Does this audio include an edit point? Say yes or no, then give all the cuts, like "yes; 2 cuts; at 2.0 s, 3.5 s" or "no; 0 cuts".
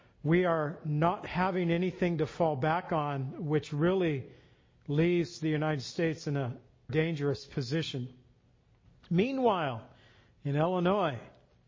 yes; 1 cut; at 6.9 s